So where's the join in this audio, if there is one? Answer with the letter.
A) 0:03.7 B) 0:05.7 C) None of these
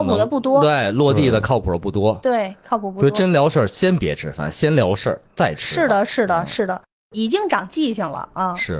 C